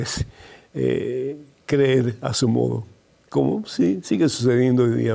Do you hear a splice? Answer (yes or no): no